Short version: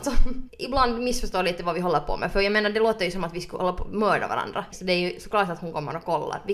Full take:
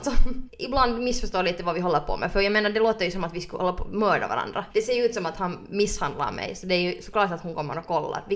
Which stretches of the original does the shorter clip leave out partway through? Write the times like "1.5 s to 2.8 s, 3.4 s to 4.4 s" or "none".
4.7 s to 6.5 s